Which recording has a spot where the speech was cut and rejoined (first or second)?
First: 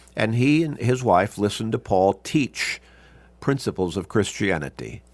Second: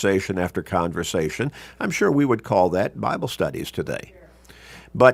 second